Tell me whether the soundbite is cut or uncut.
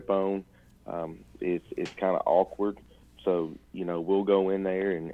cut